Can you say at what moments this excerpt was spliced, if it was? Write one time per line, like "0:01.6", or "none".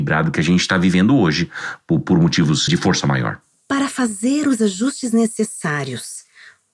0:02.7